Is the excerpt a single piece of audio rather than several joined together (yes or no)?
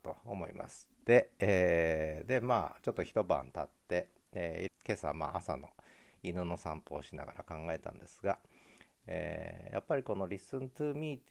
no